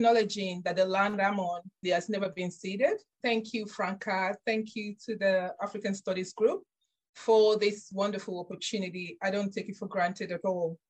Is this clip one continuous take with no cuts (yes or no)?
no